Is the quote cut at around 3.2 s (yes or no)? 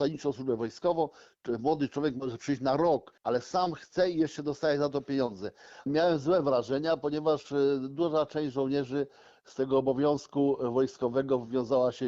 yes